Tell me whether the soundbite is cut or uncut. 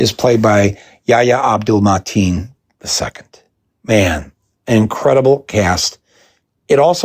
uncut